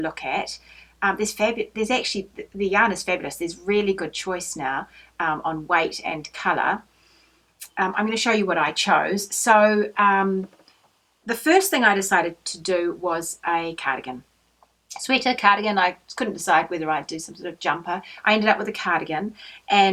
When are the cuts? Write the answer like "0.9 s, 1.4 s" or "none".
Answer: none